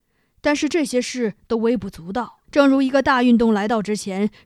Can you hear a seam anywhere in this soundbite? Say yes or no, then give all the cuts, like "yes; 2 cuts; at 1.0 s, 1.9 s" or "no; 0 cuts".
yes; 1 cut; at 2.4 s